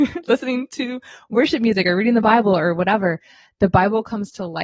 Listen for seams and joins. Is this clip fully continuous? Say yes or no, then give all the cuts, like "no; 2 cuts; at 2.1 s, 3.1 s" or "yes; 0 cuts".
yes; 0 cuts